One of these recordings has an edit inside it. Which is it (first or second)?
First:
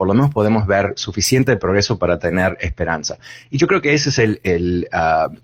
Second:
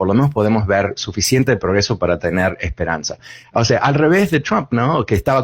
second